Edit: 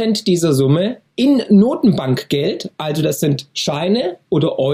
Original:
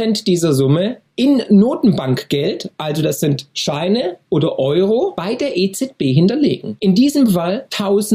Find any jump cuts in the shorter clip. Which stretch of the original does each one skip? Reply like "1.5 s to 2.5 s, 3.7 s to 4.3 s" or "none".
none